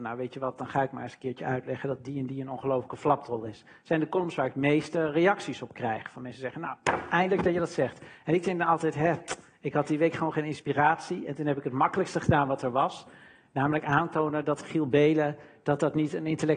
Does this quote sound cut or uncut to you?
uncut